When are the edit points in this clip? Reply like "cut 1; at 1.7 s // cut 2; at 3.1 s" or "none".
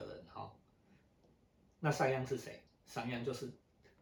none